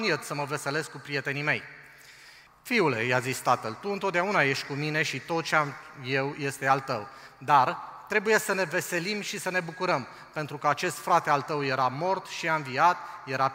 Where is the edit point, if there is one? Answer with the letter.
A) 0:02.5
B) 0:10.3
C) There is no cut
A